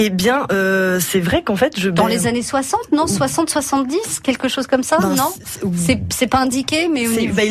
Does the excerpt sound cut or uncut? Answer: uncut